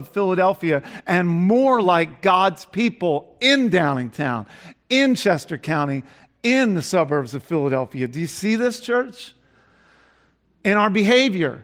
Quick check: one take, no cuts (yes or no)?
yes